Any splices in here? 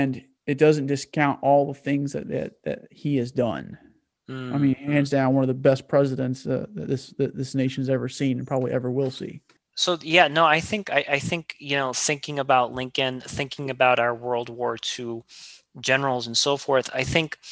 no; 0 cuts

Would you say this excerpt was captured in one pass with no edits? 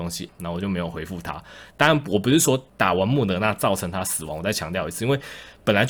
no; 1 cut; at 1.7 s

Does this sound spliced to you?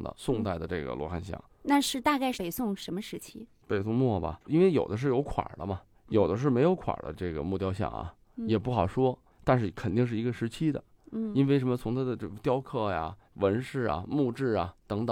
yes; 1 cut; at 4.4 s

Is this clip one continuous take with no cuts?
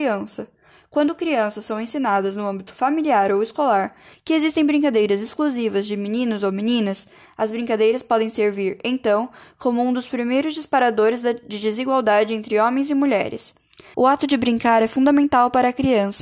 no; 1 cut; at 13.9 s

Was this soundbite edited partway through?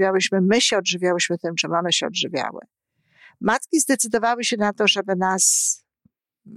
no; 0 cuts

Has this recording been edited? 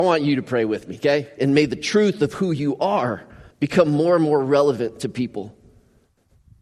yes; 2 cuts; at 1.4 s, 3.5 s

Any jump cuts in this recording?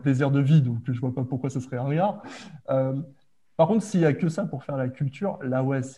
no; 0 cuts

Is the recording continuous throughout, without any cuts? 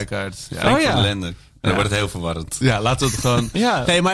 yes; 0 cuts

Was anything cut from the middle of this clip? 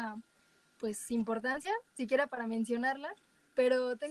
no; 0 cuts

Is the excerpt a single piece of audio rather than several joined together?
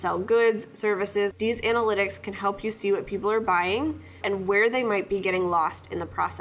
no; 2 cuts; at 1.3 s, 4.2 s

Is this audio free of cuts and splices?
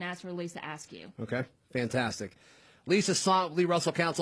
yes; 0 cuts

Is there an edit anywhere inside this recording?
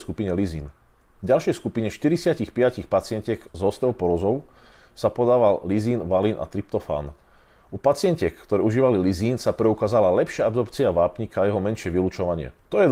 no; 0 cuts

